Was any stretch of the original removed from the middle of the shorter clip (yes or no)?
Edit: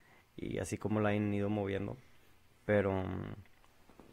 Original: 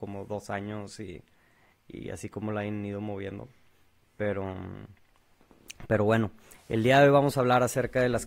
no